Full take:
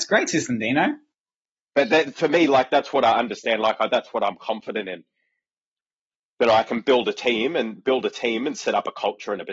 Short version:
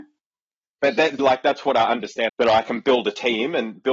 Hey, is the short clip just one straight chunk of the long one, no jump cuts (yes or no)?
no